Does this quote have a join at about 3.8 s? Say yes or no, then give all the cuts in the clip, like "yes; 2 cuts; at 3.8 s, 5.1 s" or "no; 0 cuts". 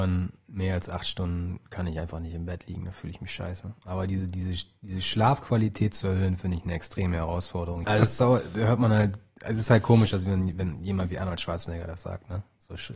no; 1 cut; at 7.8 s